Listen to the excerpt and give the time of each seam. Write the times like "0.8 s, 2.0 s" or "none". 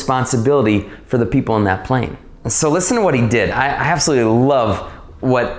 2.4 s